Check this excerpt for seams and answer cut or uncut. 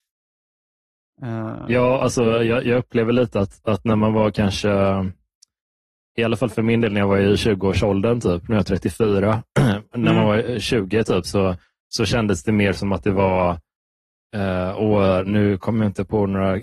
uncut